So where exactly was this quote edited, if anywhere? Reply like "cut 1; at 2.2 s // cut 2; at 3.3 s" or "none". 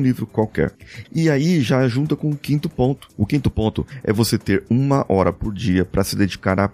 cut 1; at 1.0 s